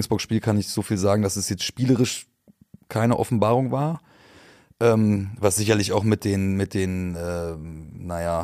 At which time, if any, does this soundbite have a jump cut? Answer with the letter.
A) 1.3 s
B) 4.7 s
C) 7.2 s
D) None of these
D